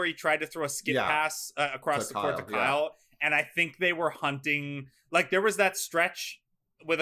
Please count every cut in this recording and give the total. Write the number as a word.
zero